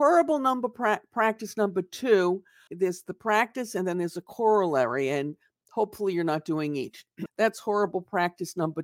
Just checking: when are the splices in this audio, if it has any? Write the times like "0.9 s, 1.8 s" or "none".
2.7 s, 7.3 s